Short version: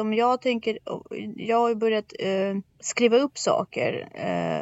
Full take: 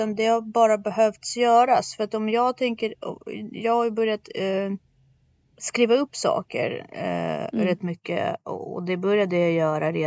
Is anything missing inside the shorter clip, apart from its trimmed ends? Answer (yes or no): yes